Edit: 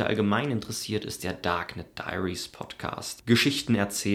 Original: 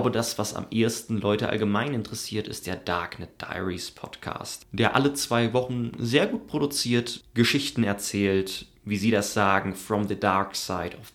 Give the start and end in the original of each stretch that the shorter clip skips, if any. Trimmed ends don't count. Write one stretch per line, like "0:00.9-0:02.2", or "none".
0:04.7-0:07.3